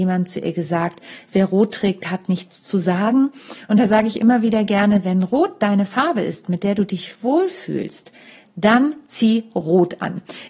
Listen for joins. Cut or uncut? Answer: uncut